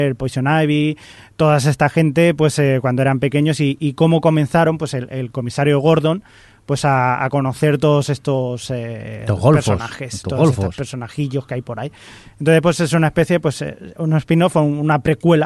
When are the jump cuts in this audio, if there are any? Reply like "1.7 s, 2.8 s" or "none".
none